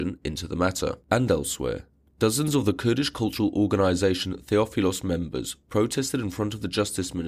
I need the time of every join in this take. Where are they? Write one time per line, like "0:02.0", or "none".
0:01.0